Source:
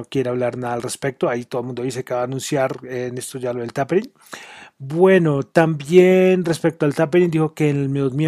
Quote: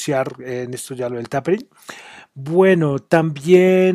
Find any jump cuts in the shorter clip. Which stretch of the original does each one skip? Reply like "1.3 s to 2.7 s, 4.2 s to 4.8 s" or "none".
none

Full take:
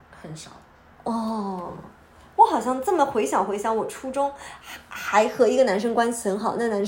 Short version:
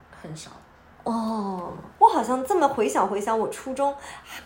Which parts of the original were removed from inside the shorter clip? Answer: 1.9 s to 2.3 s

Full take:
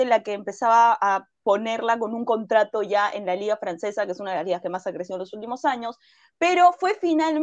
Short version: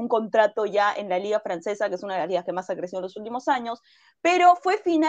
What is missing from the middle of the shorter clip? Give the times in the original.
none

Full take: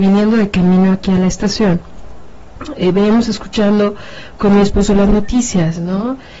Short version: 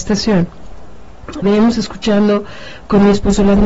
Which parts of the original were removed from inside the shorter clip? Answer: 2.7 s to 2.9 s

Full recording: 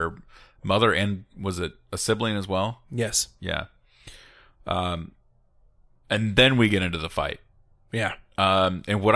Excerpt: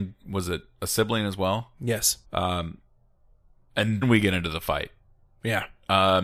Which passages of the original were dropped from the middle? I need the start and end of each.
3.3 s to 4.6 s, 6.4 s to 6.5 s

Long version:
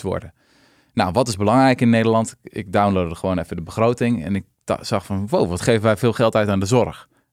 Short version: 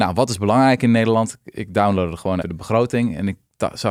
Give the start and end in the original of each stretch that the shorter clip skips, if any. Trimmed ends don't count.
3.4 s to 3.5 s

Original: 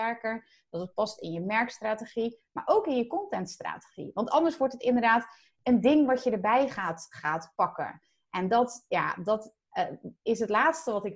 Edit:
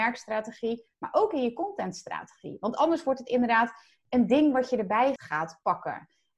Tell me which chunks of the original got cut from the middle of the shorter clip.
6.7 s to 7.1 s

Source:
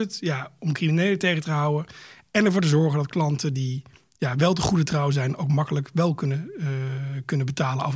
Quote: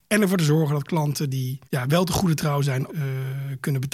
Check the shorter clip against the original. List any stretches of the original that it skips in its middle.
3.9 s to 4.1 s, 5.4 s to 6.5 s

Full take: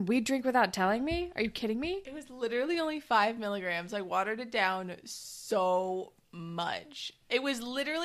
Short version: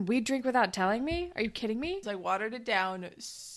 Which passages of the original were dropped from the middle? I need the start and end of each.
2.0 s to 3.9 s

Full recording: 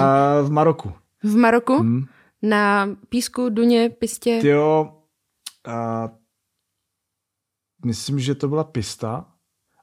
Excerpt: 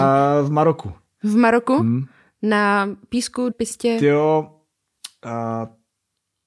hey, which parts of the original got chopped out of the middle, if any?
3.5 s to 3.9 s

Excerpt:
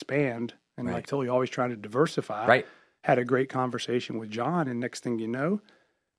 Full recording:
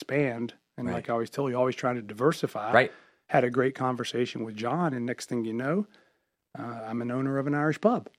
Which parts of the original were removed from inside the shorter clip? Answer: 1.0 s to 1.3 s

